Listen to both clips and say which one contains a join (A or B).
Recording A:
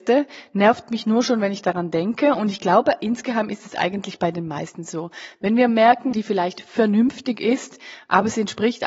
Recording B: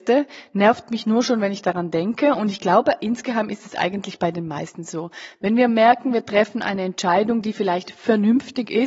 A